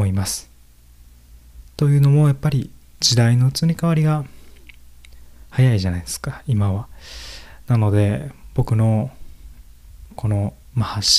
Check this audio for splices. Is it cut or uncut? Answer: cut